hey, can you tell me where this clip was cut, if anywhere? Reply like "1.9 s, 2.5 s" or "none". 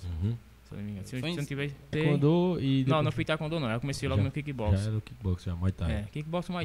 1.9 s